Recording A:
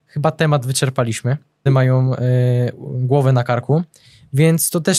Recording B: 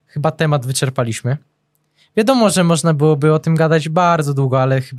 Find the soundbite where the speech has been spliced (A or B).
A